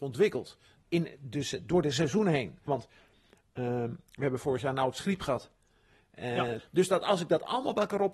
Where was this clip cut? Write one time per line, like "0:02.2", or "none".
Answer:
0:02.7
0:06.6